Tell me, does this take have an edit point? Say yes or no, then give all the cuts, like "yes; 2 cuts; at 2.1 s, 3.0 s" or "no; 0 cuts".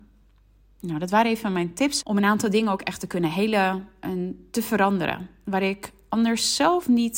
yes; 1 cut; at 2.0 s